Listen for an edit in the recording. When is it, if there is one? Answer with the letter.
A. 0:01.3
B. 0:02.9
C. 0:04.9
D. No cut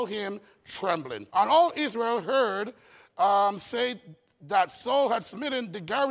A